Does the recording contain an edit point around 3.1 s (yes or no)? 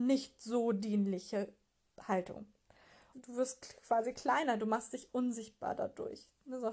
yes